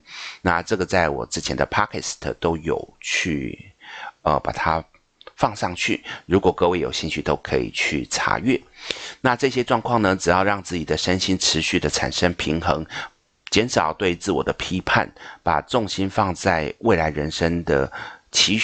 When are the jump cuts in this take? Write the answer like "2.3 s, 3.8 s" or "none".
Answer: none

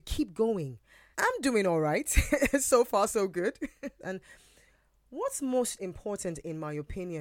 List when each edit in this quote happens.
1.1 s, 4.0 s

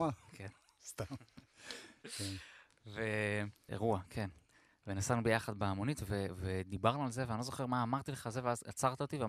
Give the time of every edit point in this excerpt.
3.7 s

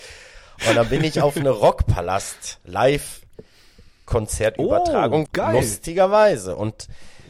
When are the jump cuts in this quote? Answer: 5.3 s

